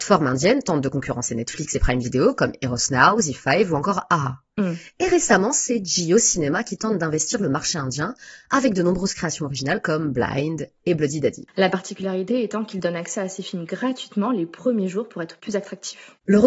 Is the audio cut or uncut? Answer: uncut